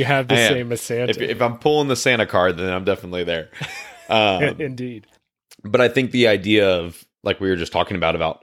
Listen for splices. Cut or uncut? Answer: uncut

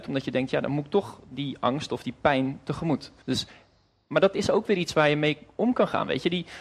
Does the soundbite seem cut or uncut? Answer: cut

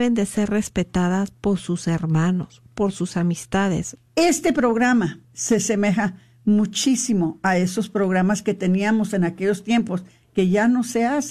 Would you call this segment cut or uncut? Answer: cut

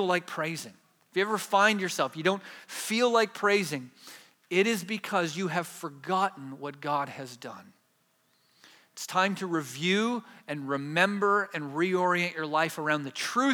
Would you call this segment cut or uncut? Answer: uncut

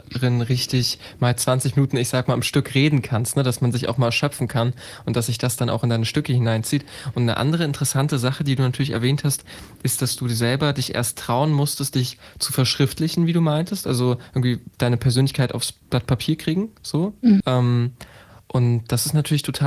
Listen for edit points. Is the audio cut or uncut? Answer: cut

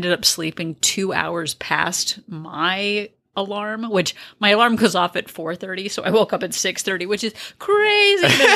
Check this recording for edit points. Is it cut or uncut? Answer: uncut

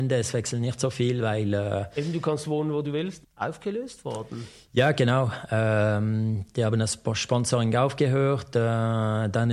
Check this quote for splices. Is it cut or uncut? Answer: cut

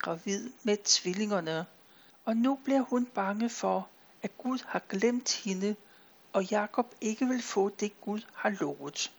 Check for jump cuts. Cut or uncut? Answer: cut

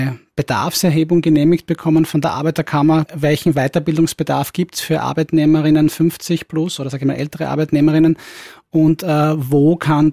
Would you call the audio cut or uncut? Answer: cut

